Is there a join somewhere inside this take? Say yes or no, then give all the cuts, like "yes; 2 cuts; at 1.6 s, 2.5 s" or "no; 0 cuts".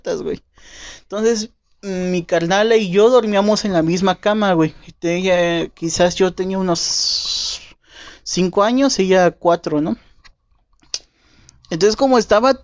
no; 0 cuts